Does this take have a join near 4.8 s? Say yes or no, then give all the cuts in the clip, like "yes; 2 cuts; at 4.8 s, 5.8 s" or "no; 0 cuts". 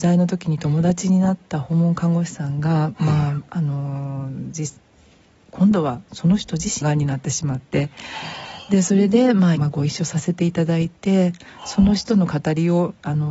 no; 2 cuts; at 6.8 s, 9.5 s